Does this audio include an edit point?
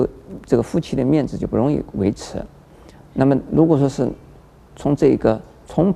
no; 0 cuts

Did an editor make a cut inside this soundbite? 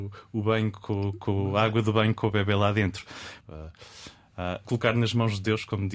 yes; 2 cuts; at 3.4 s, 4.6 s

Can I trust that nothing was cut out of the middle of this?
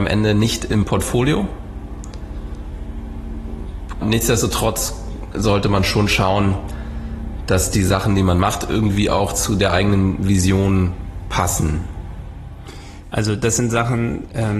no; 2 cuts; at 4.0 s, 13.0 s

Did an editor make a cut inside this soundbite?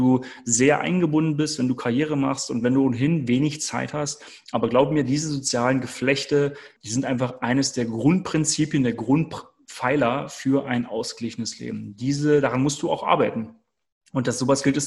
yes; 1 cut; at 6.8 s

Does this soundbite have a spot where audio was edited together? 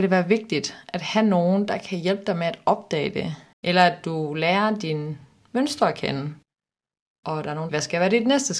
yes; 2 cuts; at 3.5 s, 7.7 s

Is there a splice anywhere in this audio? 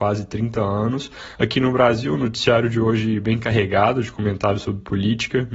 yes; 1 cut; at 1.4 s

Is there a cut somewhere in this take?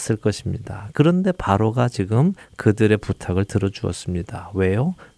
no; 0 cuts

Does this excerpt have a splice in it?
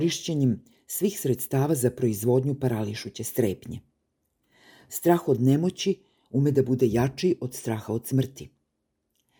no; 0 cuts

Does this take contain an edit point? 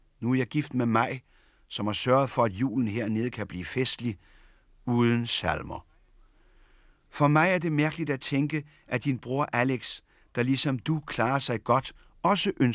no; 0 cuts

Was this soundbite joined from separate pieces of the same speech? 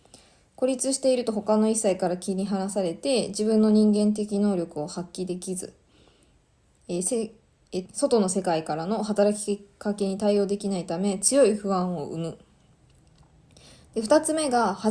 yes; 1 cut; at 7.8 s

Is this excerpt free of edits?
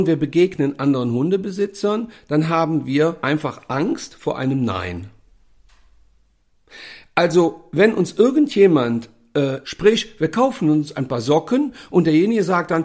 no; 2 cuts; at 3.2 s, 9.6 s

